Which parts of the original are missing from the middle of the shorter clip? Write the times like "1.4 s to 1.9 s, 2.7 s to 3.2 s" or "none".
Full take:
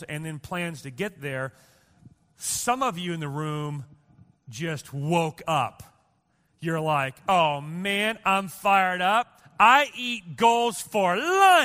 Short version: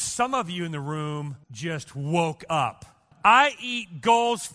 3.9 s to 4.4 s, 6.1 s to 9.5 s